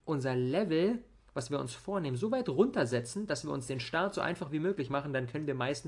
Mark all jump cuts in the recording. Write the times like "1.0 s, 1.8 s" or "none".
none